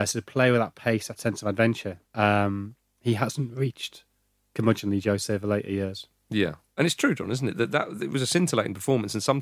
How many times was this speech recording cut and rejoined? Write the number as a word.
one